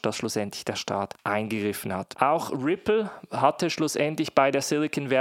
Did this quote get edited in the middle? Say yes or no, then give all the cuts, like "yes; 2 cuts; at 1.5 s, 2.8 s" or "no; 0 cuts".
no; 0 cuts